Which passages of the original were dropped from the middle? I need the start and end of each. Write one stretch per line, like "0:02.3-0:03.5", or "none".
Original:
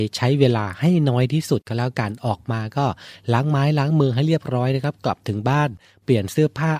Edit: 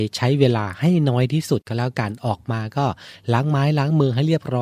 none